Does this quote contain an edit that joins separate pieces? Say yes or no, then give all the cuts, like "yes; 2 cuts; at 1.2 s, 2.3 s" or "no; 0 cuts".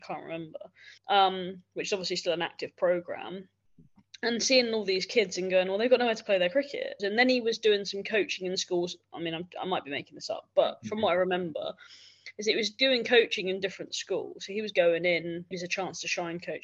yes; 3 cuts; at 1.0 s, 7.0 s, 15.5 s